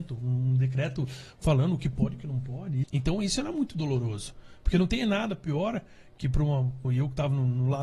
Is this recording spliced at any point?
yes; 2 cuts; at 2.8 s, 6.8 s

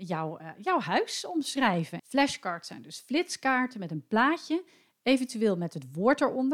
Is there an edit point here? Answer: yes; 1 cut; at 2.0 s

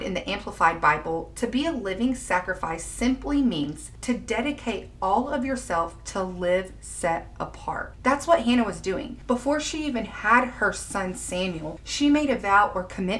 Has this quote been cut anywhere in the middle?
no; 0 cuts

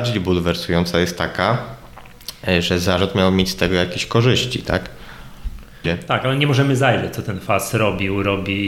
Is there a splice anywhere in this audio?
yes; 1 cut; at 5.8 s

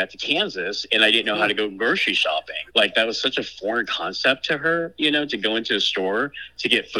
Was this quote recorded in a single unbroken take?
no; 1 cut; at 2.7 s

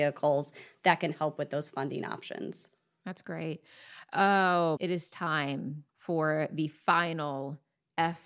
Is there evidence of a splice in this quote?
yes; 2 cuts; at 4.8 s, 5.9 s

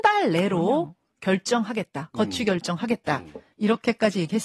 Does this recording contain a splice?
no; 0 cuts

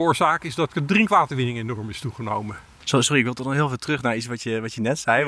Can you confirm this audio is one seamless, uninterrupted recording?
yes; 0 cuts

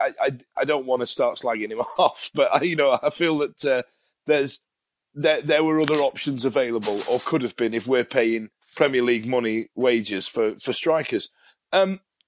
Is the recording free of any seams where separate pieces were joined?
yes; 0 cuts

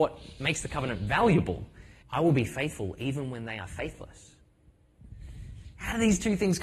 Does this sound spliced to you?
yes; 1 cut; at 2.0 s

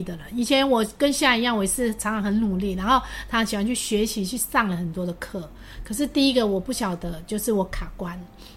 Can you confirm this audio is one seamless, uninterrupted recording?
yes; 0 cuts

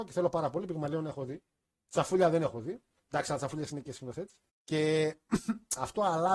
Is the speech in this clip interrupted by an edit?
yes; 1 cut; at 4.5 s

